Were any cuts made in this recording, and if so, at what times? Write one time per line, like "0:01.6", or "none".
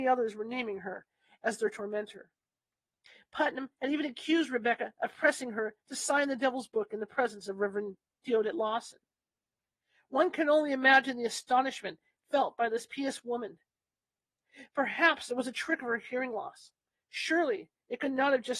none